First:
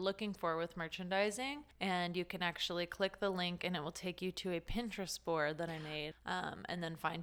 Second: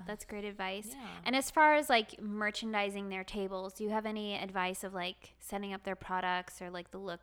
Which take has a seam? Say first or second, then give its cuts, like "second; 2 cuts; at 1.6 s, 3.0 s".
first; 2 cuts; at 1.7 s, 6.1 s